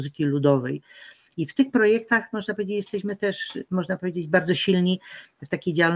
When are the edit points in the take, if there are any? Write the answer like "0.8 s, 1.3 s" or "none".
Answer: none